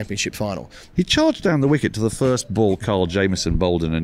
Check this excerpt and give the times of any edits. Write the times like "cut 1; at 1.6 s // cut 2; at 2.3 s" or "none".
cut 1; at 0.9 s